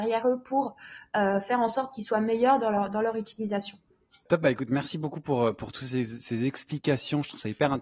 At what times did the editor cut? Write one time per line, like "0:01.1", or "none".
none